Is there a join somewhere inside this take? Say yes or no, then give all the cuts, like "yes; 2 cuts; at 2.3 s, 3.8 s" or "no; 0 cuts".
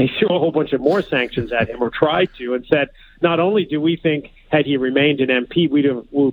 no; 0 cuts